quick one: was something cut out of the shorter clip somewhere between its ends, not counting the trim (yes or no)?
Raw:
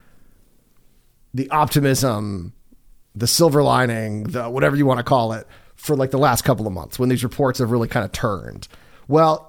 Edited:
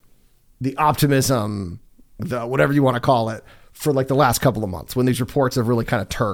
yes